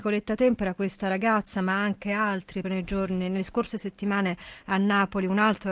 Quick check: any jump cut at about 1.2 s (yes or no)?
no